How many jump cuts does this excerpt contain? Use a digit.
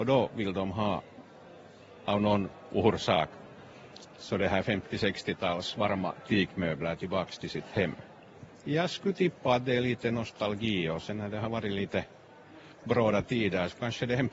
1